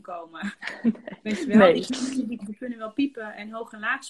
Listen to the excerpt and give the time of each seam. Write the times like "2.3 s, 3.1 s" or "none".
2.4 s

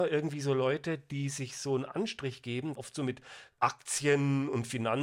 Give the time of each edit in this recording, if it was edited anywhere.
2.7 s

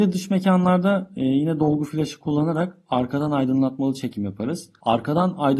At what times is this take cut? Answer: none

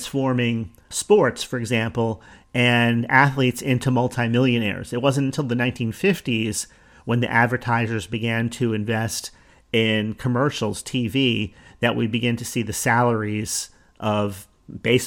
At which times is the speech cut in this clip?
0.9 s

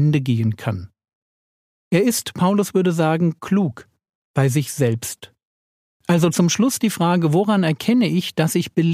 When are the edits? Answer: 1.8 s

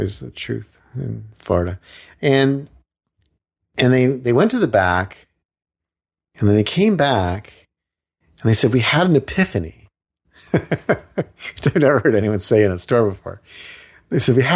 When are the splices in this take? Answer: none

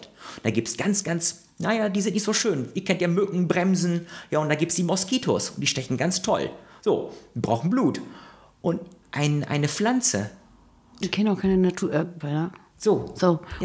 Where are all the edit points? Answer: 9.0 s, 11.0 s, 12.2 s

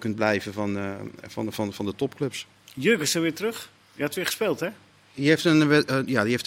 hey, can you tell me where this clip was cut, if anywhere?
none

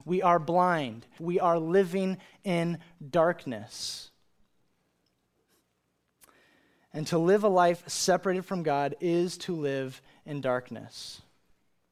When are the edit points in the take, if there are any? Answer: 1.2 s

